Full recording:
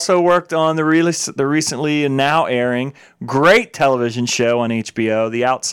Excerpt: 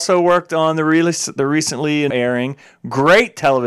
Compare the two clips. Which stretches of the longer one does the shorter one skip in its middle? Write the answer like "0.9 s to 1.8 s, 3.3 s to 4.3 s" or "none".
2.1 s to 2.5 s